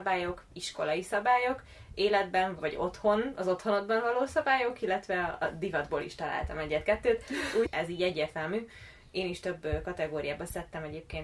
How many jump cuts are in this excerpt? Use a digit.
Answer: 2